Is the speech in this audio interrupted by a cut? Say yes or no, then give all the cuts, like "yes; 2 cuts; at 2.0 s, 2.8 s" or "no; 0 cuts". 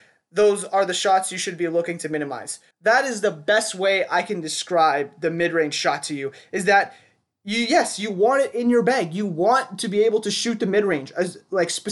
yes; 1 cut; at 2.7 s